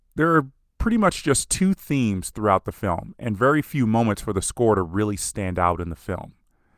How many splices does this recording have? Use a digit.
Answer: 0